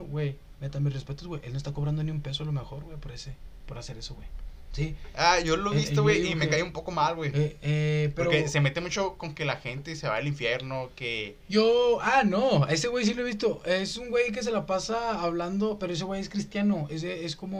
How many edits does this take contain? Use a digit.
0